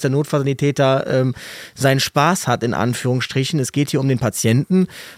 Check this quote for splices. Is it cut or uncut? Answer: uncut